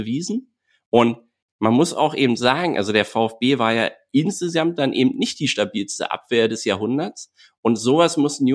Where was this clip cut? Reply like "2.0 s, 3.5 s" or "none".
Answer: none